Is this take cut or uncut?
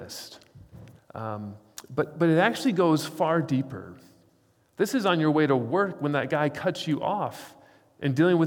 cut